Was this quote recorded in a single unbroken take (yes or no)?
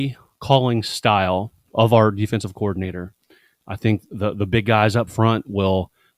yes